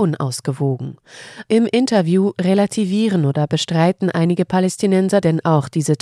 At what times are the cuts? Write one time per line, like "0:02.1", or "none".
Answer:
0:01.5